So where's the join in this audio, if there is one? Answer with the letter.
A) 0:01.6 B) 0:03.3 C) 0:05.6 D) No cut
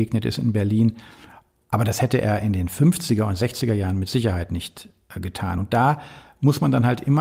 D